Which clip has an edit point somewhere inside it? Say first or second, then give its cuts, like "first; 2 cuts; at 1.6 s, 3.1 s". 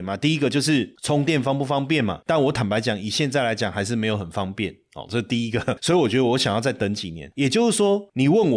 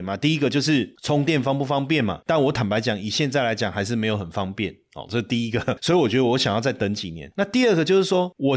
first; 1 cut; at 7.3 s